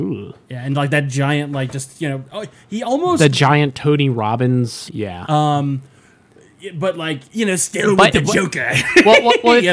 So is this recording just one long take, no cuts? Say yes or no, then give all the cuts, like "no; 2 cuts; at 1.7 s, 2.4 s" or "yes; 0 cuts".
no; 1 cut; at 4.9 s